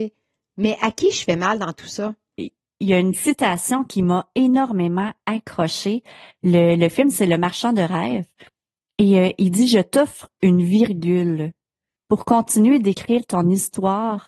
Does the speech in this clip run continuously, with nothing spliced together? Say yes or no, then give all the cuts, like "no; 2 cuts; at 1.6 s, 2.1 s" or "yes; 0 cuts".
no; 1 cut; at 2.4 s